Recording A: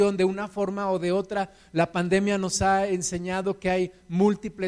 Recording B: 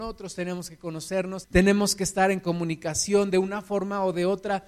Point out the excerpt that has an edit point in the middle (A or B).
B